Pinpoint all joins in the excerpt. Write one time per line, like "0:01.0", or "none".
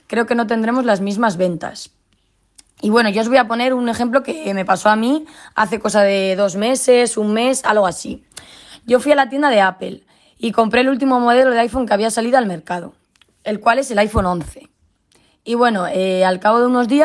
none